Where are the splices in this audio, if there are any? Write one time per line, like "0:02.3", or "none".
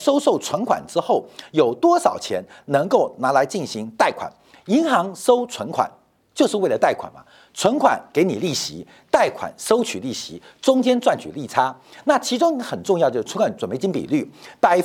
none